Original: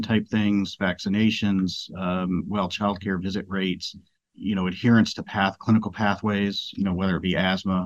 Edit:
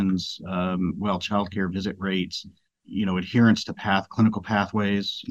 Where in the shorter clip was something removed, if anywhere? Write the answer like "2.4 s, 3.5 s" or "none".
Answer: none